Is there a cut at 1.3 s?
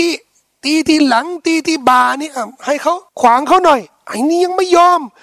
no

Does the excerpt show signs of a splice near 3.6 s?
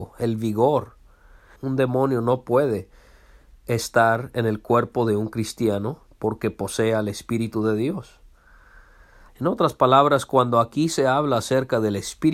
no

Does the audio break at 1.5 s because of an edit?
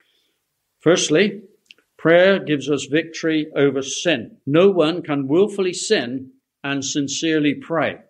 no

